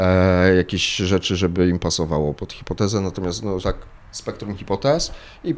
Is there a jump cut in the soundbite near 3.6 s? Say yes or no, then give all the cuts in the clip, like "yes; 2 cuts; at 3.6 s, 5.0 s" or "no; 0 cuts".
yes; 2 cuts; at 2.4 s, 3.6 s